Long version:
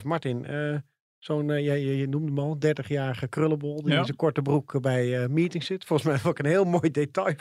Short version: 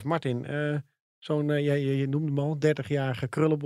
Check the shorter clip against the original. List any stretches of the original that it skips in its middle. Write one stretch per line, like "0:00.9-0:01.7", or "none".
none